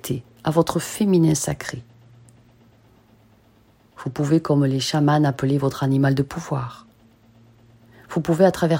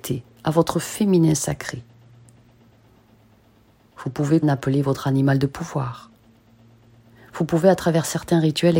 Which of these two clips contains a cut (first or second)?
second